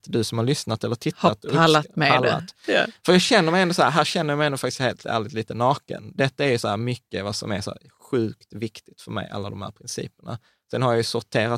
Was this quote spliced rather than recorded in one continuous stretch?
no; 0 cuts

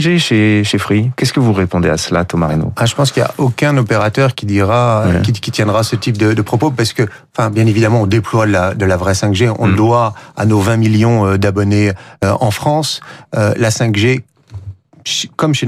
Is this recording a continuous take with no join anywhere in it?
yes; 0 cuts

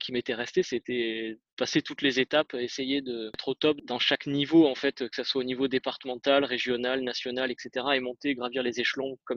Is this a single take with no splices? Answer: yes; 0 cuts

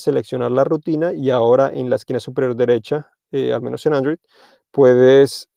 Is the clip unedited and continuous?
yes; 0 cuts

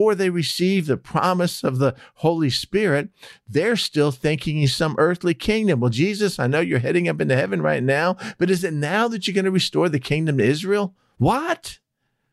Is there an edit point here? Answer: no; 0 cuts

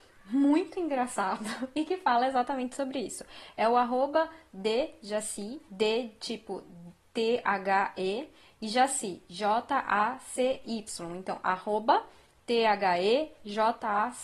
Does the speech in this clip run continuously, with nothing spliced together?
yes; 0 cuts

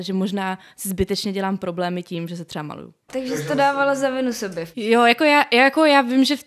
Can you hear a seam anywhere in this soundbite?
yes; 1 cut; at 3.1 s

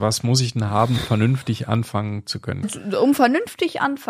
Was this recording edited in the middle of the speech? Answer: yes; 2 cuts; at 1.0 s, 2.6 s

